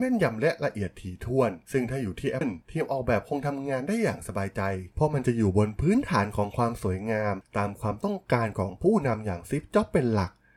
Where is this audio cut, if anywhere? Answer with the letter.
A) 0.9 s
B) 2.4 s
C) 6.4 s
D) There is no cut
B